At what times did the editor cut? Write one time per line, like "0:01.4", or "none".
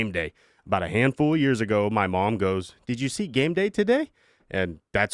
none